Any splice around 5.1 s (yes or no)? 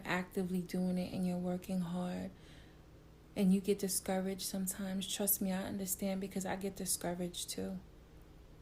no